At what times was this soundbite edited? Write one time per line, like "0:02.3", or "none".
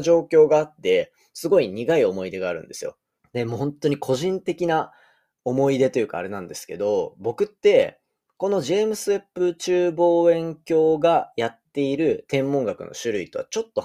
0:03.2

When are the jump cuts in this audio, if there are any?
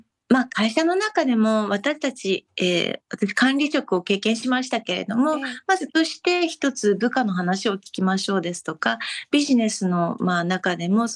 0:05.9

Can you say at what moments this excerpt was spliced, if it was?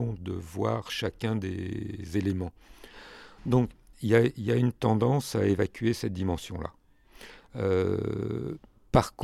none

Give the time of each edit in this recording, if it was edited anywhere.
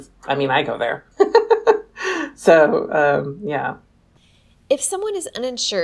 none

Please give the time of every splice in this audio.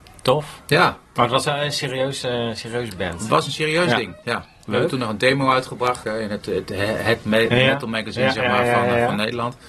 0:01.2
0:04.2
0:06.0

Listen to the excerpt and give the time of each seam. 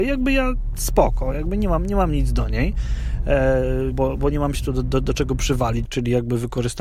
0:03.9
0:05.9

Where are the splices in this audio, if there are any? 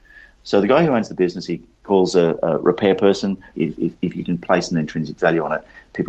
0:03.5

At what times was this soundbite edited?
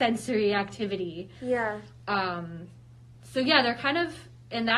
none

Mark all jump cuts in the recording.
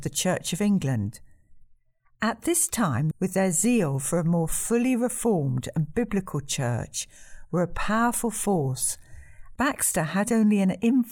0:03.1
0:09.6

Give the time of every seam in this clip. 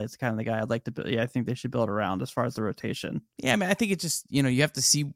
0:03.3

